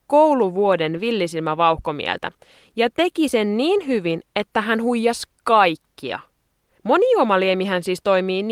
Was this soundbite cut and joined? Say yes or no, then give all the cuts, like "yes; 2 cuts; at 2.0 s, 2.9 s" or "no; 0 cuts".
yes; 1 cut; at 6.8 s